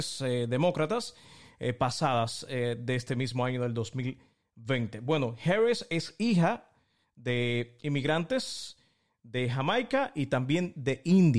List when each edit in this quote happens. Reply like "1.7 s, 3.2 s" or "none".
none